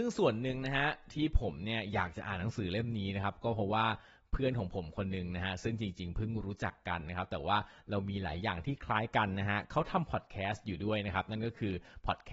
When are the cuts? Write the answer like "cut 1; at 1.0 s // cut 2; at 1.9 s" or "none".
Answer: none